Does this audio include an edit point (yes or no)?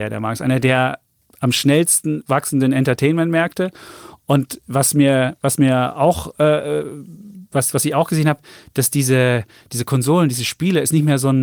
no